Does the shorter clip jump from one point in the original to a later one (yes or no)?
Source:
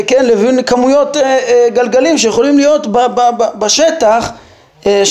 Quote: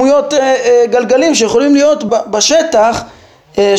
yes